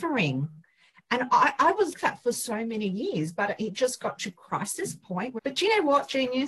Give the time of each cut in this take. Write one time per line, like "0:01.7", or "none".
0:01.9
0:05.4